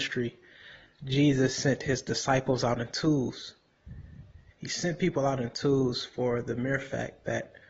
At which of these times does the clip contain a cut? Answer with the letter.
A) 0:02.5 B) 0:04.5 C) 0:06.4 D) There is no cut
B